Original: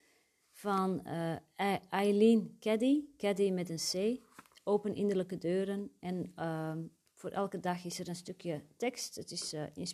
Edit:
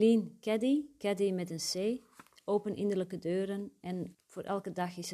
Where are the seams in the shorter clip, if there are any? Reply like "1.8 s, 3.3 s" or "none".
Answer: 4.1 s